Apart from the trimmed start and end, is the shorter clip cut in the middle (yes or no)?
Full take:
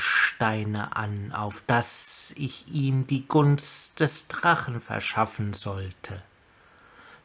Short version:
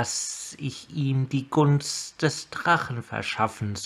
no